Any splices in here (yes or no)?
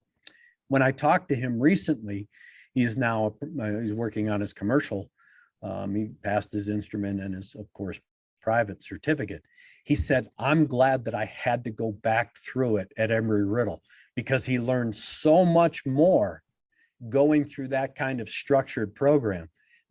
no